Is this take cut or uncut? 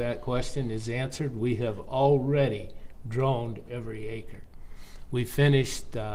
uncut